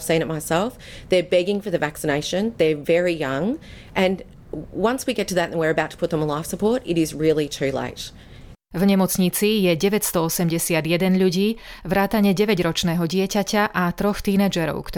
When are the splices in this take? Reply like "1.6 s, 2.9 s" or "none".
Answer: 8.5 s